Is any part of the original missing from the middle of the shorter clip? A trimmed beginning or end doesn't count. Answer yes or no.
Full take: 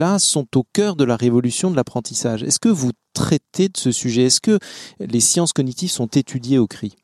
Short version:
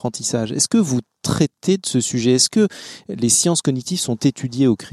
no